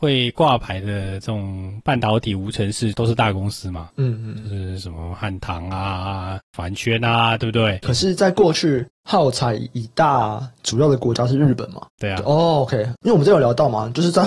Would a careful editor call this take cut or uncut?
cut